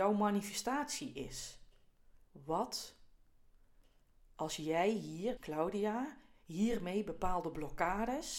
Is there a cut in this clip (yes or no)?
yes